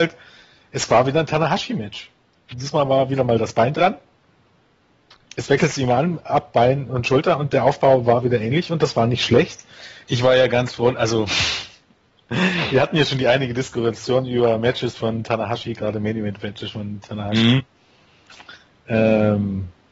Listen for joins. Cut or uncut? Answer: cut